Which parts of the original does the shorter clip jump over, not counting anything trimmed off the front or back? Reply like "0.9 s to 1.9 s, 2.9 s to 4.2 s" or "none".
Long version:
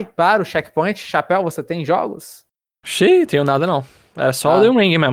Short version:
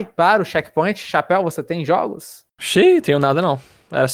2.5 s to 2.8 s